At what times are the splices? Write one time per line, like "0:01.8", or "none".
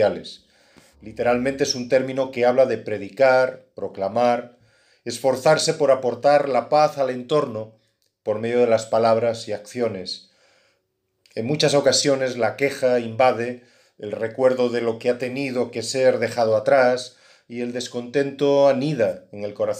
0:00.9